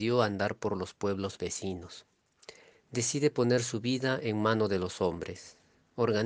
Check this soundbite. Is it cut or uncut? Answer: cut